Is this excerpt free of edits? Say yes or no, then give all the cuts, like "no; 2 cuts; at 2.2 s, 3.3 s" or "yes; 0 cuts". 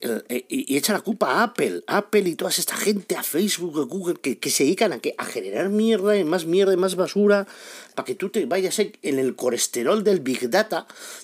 yes; 0 cuts